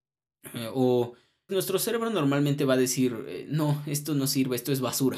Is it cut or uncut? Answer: cut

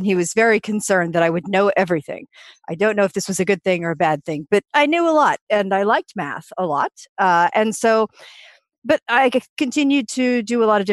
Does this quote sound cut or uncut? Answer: uncut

